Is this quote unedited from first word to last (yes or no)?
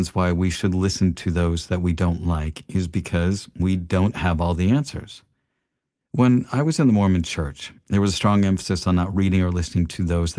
yes